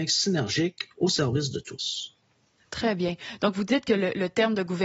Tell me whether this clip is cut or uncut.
uncut